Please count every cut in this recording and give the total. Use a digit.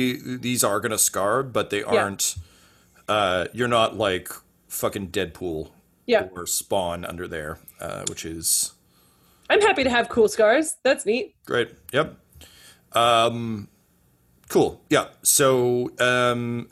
0